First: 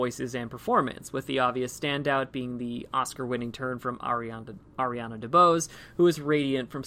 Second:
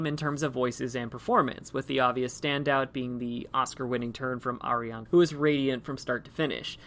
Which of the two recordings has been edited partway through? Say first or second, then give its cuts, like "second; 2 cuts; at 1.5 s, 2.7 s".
second; 1 cut; at 5.1 s